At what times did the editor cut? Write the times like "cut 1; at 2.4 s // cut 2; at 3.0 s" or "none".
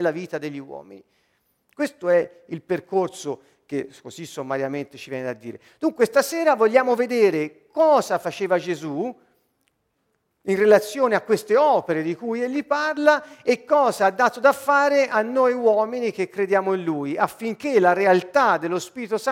none